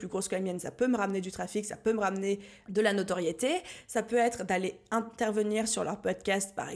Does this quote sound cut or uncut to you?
uncut